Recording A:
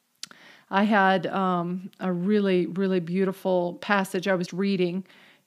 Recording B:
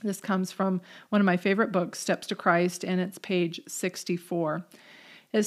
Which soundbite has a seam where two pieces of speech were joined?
A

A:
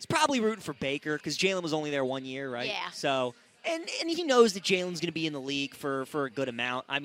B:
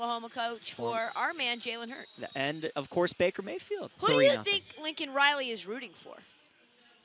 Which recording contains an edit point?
B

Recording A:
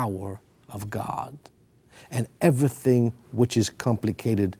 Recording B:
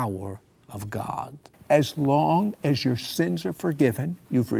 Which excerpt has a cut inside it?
B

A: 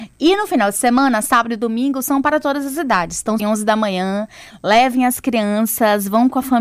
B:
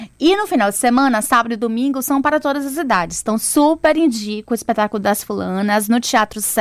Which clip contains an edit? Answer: A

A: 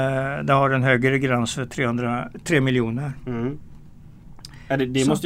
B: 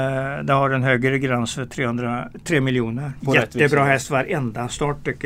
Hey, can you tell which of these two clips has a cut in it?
B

